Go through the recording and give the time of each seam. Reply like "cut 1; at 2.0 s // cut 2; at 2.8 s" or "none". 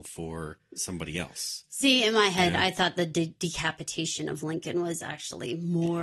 none